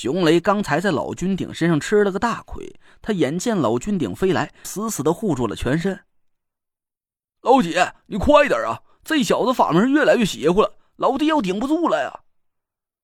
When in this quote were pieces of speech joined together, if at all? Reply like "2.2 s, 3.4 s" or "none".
4.6 s